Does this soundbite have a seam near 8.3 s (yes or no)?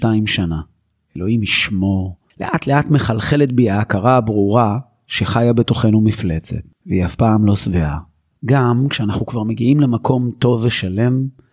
yes